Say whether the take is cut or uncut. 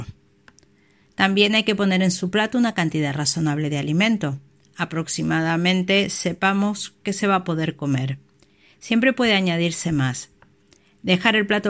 uncut